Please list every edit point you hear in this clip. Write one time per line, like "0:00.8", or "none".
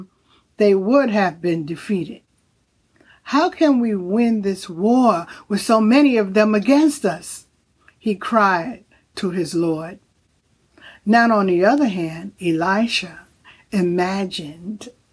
none

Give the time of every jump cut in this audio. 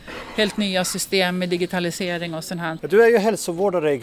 0:02.8

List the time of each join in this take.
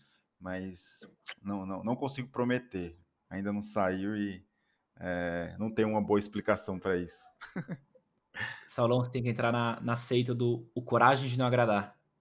none

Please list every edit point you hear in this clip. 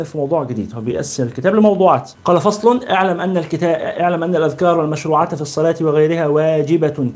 0:02.1

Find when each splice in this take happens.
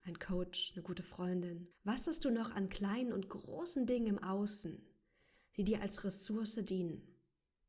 0:01.7

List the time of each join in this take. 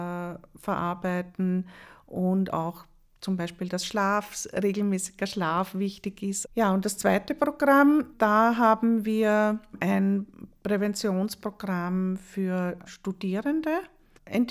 0:06.4
0:12.9

